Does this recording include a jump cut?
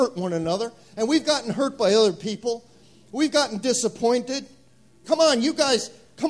yes; 1 cut; at 5.0 s

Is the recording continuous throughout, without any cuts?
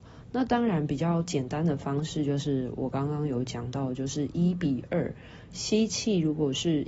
yes; 0 cuts

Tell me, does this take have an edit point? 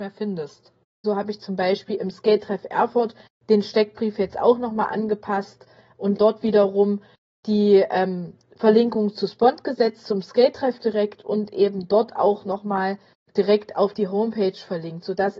yes; 2 cuts; at 1.0 s, 6.2 s

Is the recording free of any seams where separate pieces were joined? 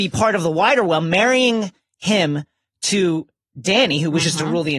yes; 0 cuts

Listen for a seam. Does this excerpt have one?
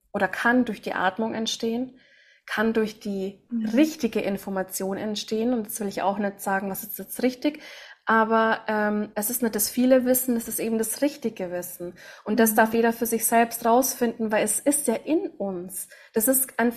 yes; 1 cut; at 9.1 s

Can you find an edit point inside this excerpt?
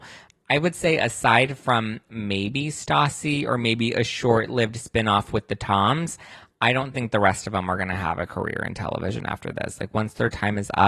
no; 0 cuts

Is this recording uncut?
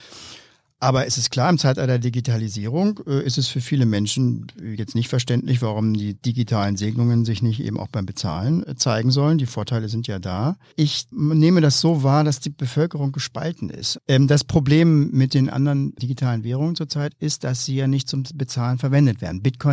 no; 2 cuts; at 14.0 s, 16.0 s

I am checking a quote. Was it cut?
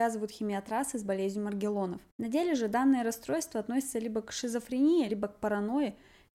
yes; 2 cuts; at 2.1 s, 5.1 s

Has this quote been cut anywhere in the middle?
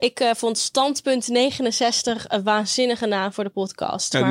no; 0 cuts

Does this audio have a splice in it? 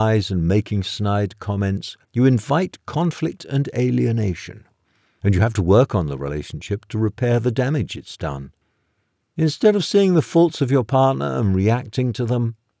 yes; 1 cut; at 2.0 s

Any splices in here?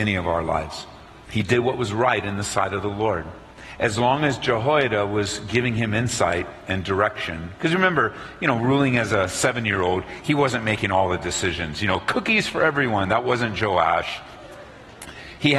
no; 0 cuts

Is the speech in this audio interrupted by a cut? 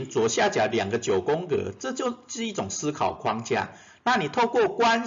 no; 0 cuts

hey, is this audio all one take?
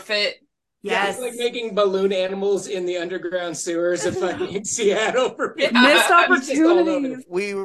yes; 0 cuts

